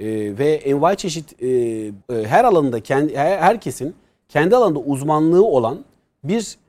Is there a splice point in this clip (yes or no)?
yes